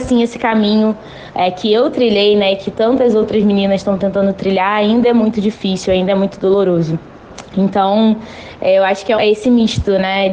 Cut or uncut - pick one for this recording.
cut